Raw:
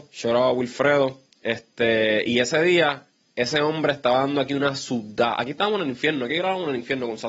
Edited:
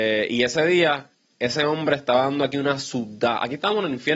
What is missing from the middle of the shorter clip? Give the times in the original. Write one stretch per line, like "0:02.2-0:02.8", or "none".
none